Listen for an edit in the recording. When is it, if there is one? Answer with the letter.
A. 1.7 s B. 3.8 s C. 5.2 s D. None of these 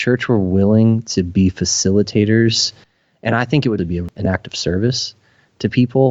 B